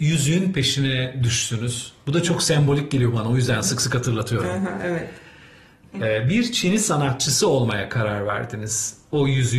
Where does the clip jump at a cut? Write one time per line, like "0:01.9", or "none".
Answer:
none